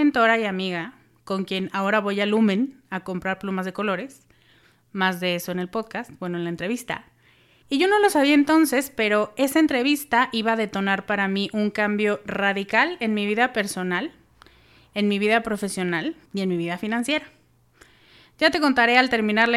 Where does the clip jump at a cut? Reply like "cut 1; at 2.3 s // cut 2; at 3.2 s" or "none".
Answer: cut 1; at 7.6 s // cut 2; at 16.3 s